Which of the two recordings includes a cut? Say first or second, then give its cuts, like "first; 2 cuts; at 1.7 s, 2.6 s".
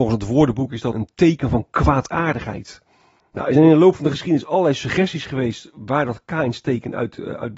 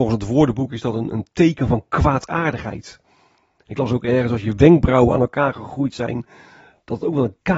first; 2 cuts; at 0.9 s, 3.2 s